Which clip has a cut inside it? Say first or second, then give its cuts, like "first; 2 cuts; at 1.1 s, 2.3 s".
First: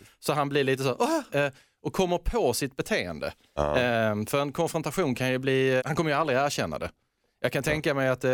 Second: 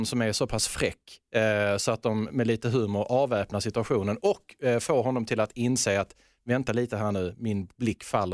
first; 2 cuts; at 1.3 s, 5.8 s